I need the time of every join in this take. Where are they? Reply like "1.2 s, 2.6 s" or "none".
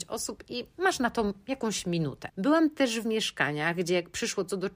2.3 s